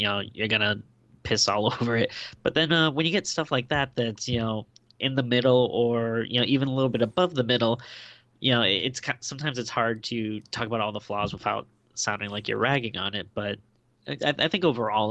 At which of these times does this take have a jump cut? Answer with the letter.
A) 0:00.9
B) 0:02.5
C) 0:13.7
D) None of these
D